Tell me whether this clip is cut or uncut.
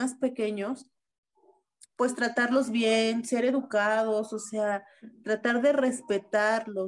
uncut